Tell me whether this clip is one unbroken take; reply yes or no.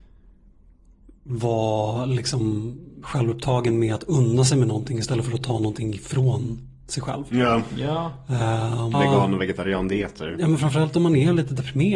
no